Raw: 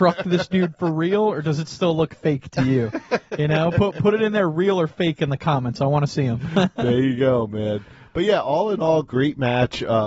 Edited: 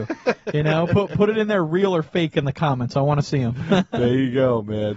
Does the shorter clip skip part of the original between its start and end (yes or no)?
no